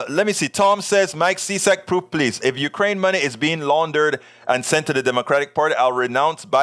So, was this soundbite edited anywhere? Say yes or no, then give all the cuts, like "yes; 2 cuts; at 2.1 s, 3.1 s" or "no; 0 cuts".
no; 0 cuts